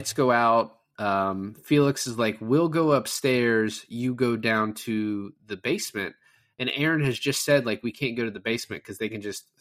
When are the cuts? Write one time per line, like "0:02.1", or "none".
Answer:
none